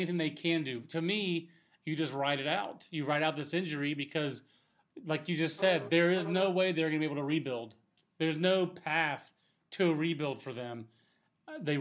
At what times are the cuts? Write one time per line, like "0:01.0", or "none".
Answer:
none

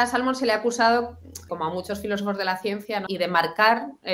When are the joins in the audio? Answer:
0:01.5
0:03.1

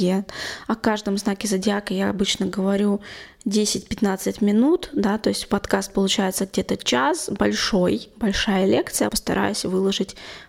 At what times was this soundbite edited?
0:09.1

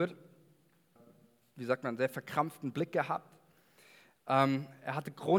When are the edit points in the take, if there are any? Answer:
0:01.0

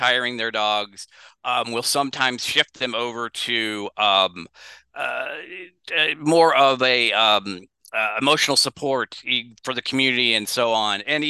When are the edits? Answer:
none

